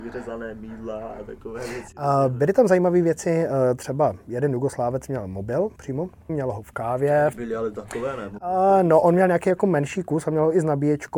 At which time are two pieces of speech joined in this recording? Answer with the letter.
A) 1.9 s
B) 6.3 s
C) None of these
B